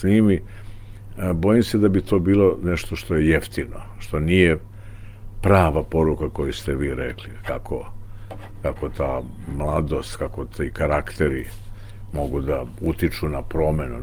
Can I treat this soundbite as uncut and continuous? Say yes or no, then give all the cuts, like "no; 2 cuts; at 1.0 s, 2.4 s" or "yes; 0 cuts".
yes; 0 cuts